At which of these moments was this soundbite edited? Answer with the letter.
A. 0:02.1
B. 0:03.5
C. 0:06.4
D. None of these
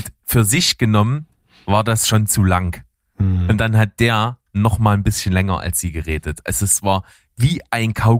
D